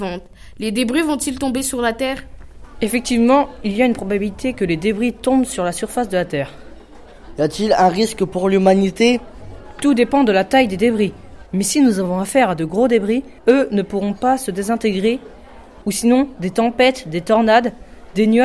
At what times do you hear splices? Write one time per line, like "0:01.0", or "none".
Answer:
0:11.5
0:13.4
0:15.8